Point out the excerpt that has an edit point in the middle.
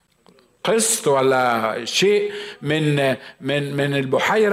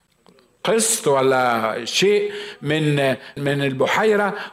second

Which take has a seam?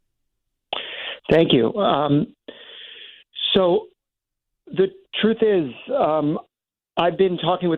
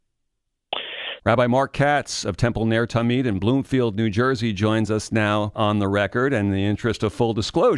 second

